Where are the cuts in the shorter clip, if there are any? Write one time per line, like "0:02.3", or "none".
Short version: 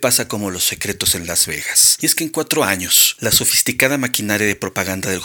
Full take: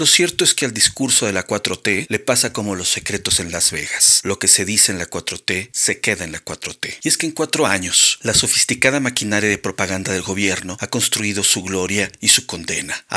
0:02.0